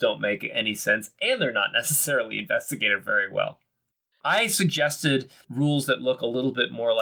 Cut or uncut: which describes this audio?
cut